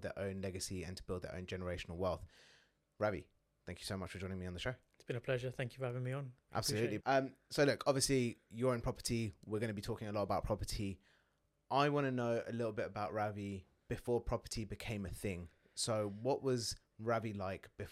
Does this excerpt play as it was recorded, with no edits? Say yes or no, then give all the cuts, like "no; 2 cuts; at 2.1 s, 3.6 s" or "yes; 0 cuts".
no; 1 cut; at 7.0 s